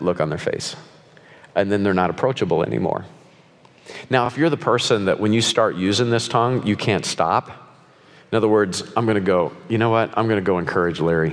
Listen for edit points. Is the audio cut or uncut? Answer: uncut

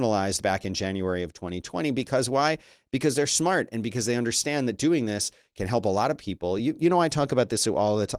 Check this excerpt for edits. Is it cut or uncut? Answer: uncut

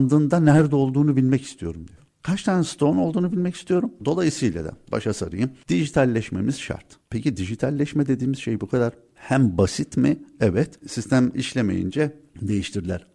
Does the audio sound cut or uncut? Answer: cut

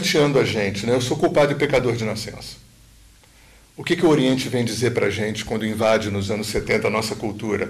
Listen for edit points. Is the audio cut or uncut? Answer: uncut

